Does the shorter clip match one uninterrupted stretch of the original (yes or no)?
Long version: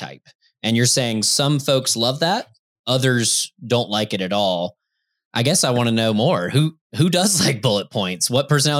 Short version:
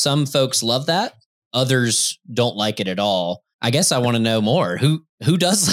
no